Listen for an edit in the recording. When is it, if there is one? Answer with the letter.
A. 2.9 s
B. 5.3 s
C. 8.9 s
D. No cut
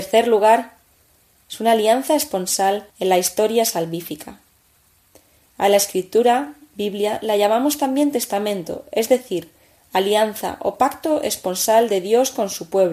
A